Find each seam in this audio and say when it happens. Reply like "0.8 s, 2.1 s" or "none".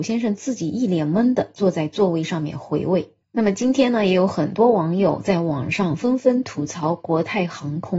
none